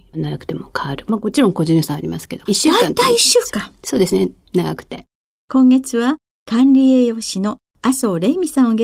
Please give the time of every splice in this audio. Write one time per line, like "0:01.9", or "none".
0:02.5
0:05.4